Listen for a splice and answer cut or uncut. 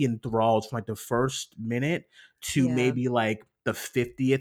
uncut